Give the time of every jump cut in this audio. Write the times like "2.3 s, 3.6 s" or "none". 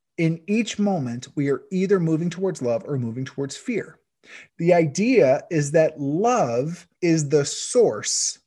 4.5 s, 7.0 s